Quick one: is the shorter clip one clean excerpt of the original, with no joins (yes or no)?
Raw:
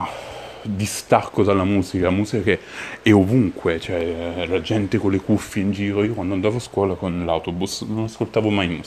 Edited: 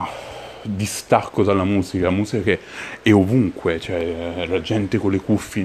yes